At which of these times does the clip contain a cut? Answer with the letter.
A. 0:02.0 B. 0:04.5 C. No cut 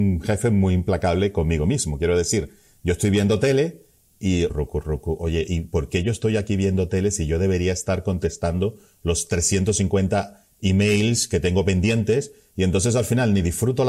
B